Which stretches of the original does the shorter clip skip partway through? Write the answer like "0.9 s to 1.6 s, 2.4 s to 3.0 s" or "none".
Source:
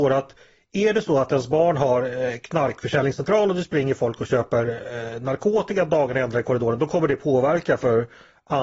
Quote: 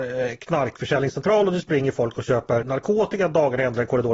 4.6 s to 5.2 s